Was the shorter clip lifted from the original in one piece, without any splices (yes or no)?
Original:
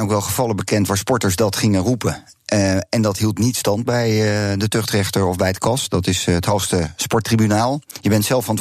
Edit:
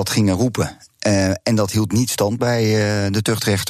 yes